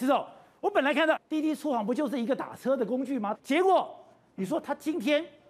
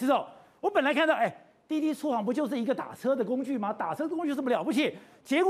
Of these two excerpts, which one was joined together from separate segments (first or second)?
first